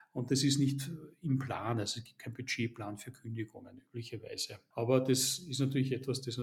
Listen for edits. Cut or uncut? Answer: cut